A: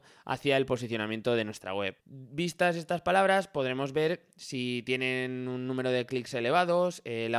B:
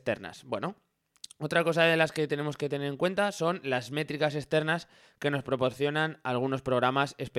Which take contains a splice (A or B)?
A